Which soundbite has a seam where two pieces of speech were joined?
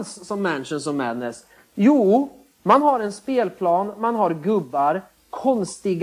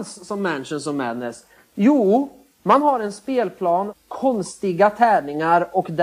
second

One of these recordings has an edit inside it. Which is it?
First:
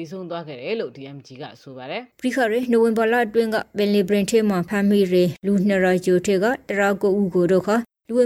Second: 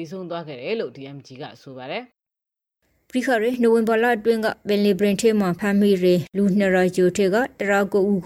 first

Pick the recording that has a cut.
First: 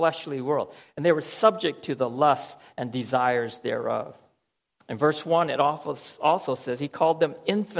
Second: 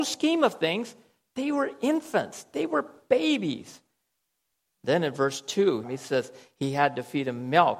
second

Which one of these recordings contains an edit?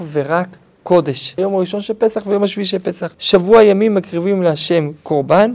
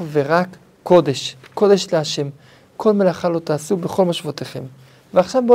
first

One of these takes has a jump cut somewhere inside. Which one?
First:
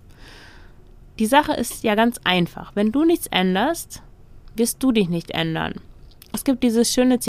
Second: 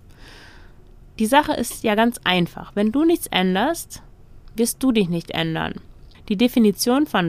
second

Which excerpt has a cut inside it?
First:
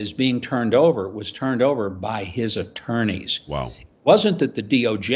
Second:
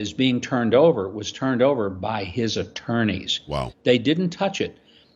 second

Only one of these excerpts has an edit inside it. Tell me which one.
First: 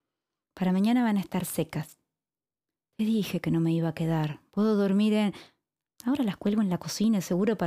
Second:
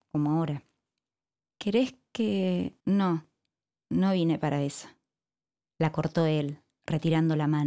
second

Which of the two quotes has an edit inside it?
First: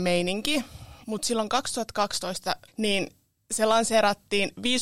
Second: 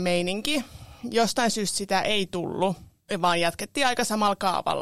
first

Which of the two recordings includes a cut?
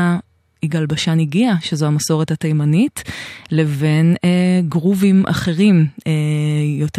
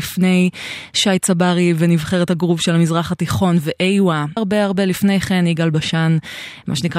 second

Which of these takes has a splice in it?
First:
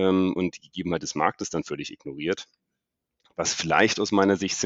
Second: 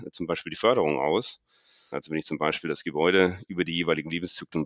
second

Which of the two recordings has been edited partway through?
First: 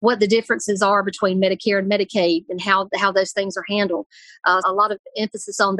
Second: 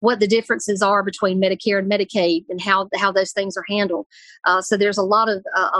first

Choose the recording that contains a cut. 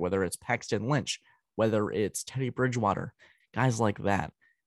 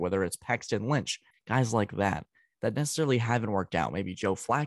second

